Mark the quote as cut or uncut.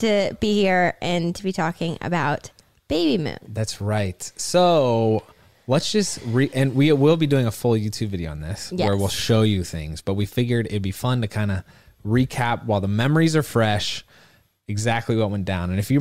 uncut